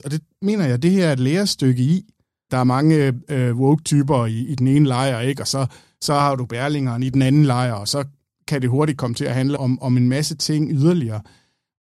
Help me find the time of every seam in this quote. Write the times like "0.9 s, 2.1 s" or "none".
2.5 s, 9.6 s